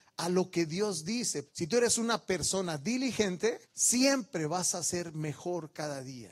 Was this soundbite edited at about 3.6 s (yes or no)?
yes